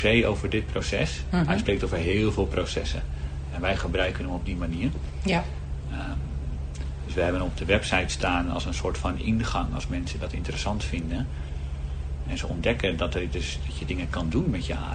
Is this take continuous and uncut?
yes; 0 cuts

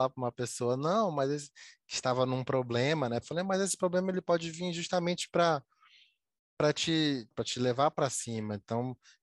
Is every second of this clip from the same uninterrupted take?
no; 2 cuts; at 3.2 s, 7.3 s

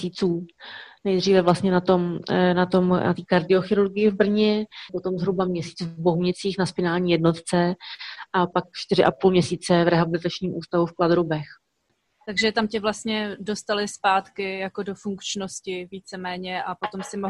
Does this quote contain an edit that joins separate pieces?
yes; 1 cut; at 4.9 s

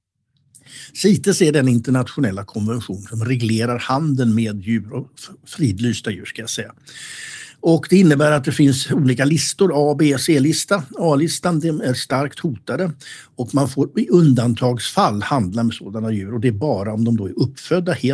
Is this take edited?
no; 0 cuts

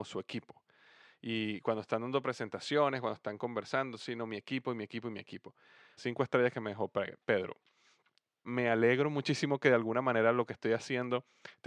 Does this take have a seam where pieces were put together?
yes; 2 cuts; at 6.0 s, 8.4 s

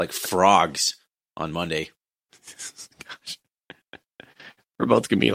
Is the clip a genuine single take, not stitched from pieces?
yes; 0 cuts

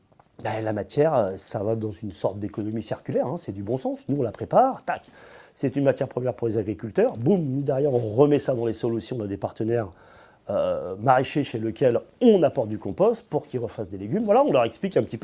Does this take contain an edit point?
no; 0 cuts

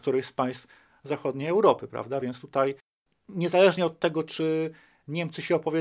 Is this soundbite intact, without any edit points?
yes; 0 cuts

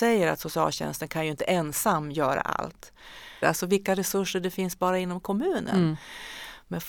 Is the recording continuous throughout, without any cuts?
no; 1 cut; at 3.4 s

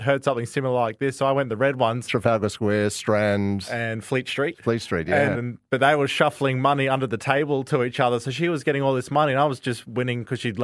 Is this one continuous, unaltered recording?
no; 1 cut; at 5.3 s

